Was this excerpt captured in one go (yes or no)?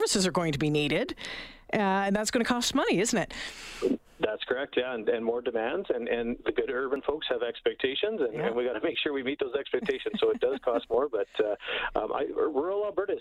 yes